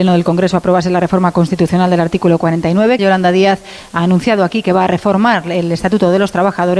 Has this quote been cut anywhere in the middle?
yes; 1 cut; at 3.0 s

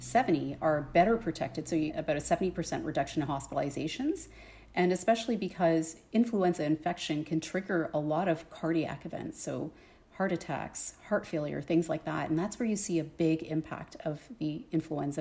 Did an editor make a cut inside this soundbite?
yes; 1 cut; at 1.9 s

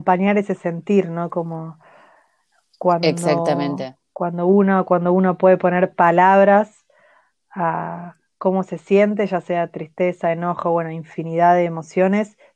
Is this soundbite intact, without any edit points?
yes; 0 cuts

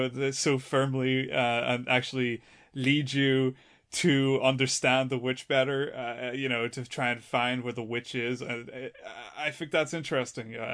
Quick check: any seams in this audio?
no; 0 cuts

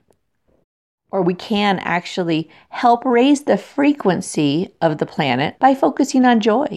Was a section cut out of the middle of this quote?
yes; 1 cut; at 5.5 s

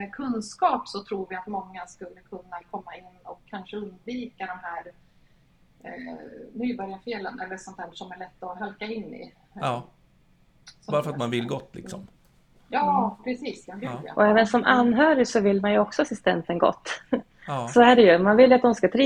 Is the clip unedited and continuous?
yes; 0 cuts

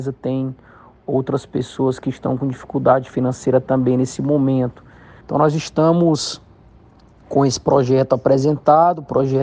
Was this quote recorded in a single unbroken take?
no; 1 cut; at 5.2 s

